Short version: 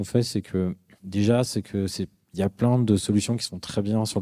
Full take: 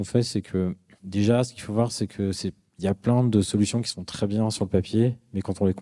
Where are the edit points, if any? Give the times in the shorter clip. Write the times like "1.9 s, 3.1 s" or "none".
1.4 s

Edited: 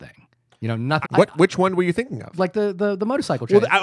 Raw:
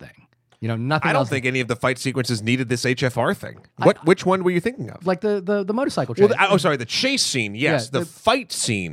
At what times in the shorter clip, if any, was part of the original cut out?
1.0 s

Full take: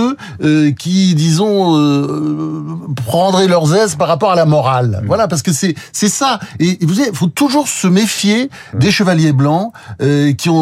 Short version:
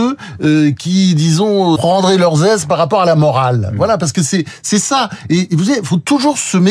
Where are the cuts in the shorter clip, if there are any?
1.8 s

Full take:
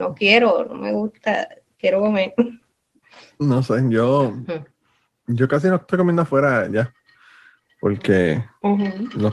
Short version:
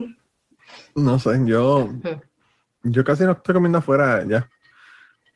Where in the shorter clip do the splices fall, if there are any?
none

